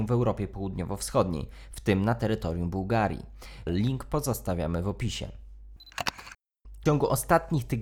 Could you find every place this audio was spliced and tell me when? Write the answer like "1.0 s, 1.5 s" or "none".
3.7 s, 6.8 s